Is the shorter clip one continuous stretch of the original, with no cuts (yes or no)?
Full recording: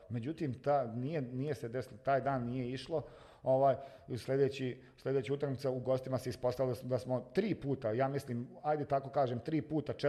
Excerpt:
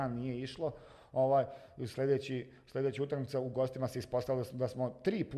yes